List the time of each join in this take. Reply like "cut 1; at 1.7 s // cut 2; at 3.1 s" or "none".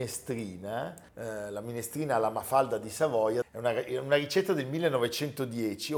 cut 1; at 1.1 s // cut 2; at 3.4 s

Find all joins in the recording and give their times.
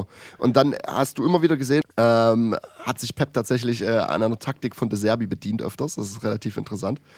cut 1; at 1.8 s

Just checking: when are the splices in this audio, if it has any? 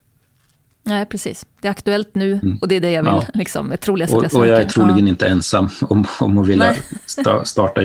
none

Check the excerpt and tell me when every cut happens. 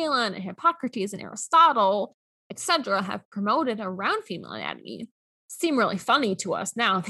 none

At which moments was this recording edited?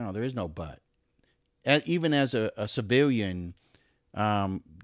none

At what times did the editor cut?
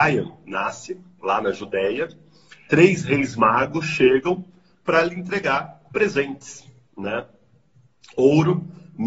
cut 1; at 2.7 s

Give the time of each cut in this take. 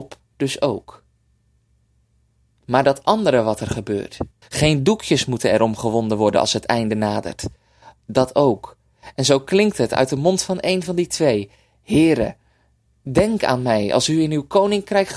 cut 1; at 4.4 s

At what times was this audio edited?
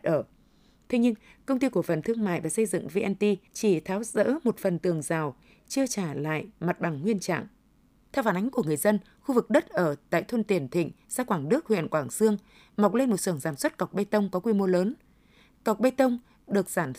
cut 1; at 3.5 s // cut 2; at 8.1 s

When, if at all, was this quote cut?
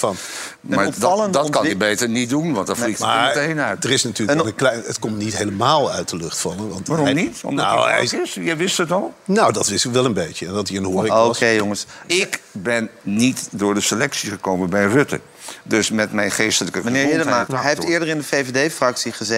cut 1; at 12.1 s // cut 2; at 17.5 s

